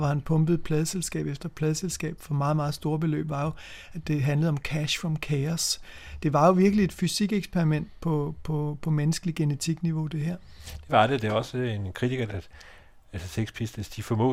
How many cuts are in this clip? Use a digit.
1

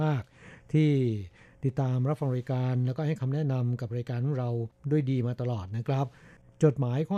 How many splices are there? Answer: 0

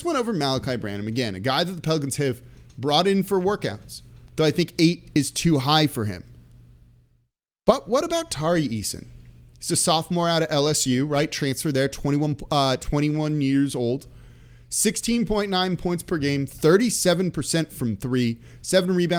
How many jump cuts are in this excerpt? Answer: 0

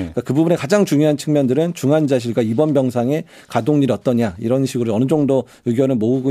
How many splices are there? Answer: 0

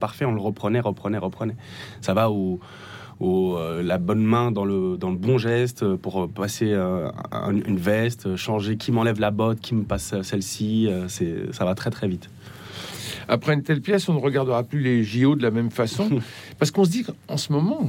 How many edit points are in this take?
0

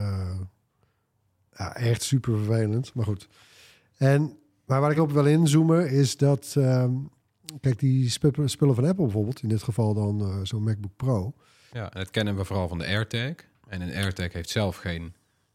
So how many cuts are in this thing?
2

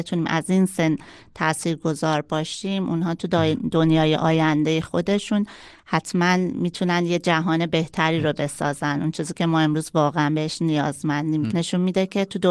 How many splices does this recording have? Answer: 1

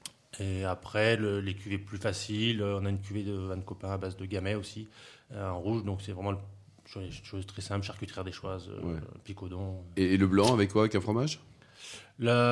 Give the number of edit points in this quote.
0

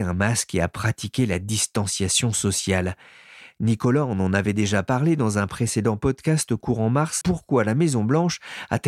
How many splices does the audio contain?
1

